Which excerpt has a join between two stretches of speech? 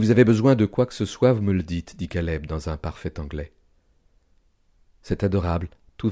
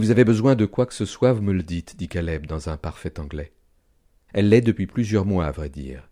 second; 1 cut; at 4.3 s

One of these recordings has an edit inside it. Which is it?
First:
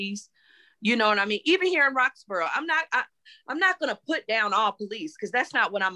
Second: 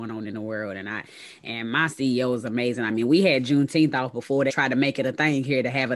second; 1 cut; at 4.5 s

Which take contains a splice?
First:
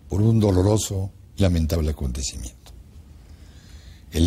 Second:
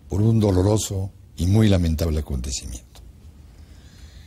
first; 1 cut; at 1.4 s

